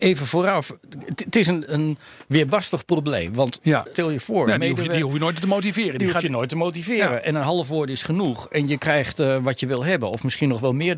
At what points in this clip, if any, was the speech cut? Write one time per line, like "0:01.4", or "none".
0:01.7
0:03.9